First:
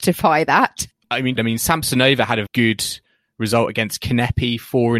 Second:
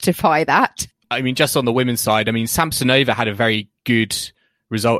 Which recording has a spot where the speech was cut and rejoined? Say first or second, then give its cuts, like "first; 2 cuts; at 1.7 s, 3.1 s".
first; 2 cuts; at 1.4 s, 2.5 s